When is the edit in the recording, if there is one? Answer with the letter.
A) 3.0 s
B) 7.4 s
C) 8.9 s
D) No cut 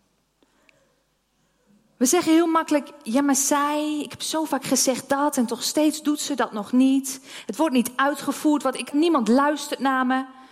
C